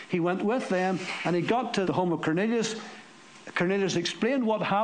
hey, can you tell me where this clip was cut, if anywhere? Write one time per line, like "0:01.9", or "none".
0:01.8